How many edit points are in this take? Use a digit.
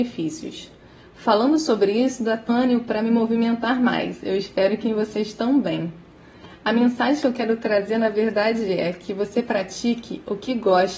1